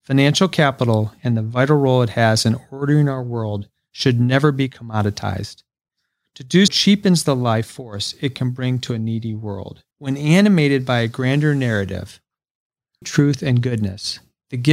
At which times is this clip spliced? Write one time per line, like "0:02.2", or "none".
0:06.7
0:09.9
0:13.0